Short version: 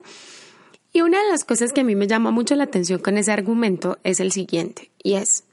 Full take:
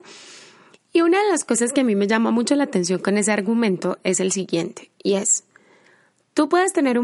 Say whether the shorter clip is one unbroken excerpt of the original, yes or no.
yes